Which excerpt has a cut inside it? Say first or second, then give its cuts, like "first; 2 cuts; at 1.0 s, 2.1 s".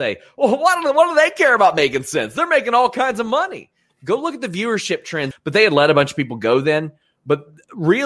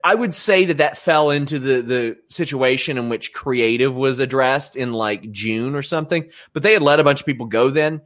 first; 1 cut; at 5.3 s